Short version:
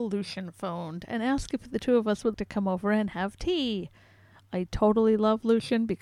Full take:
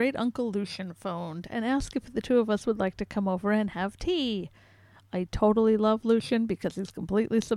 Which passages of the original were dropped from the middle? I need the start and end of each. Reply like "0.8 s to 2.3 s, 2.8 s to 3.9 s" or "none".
2.8 s to 2.9 s